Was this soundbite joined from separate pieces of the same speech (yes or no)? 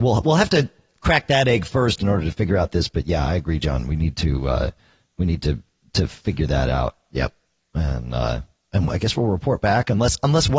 no